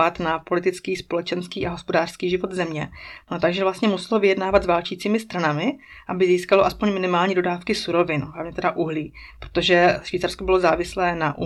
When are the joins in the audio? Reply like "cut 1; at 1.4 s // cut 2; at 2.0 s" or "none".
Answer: cut 1; at 3.2 s